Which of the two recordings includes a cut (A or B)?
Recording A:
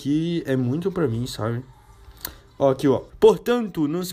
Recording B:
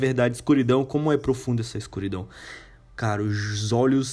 A